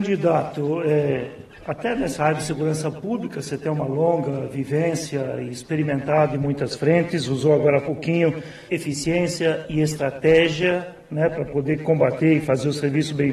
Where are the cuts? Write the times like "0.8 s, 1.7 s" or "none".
8.7 s